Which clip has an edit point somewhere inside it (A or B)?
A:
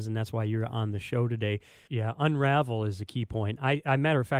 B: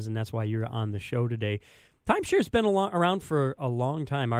A